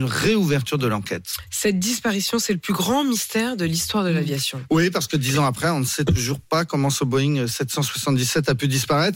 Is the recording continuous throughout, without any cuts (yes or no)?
yes